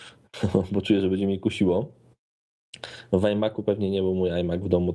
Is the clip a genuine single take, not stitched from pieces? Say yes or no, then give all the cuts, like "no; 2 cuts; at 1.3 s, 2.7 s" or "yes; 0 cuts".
yes; 0 cuts